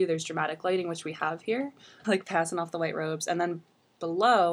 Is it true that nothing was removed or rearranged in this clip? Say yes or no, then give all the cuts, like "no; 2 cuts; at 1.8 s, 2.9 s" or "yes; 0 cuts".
no; 1 cut; at 2.0 s